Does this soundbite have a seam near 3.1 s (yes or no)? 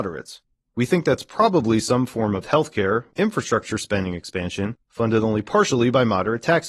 yes